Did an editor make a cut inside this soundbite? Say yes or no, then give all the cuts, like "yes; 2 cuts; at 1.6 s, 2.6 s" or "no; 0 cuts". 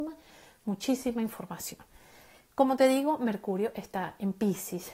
no; 0 cuts